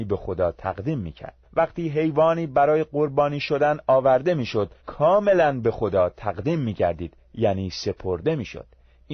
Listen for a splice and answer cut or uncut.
cut